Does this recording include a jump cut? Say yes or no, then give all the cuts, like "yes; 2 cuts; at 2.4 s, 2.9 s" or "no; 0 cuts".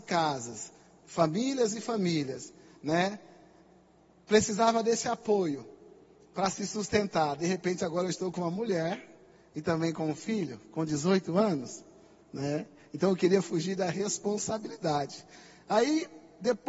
no; 0 cuts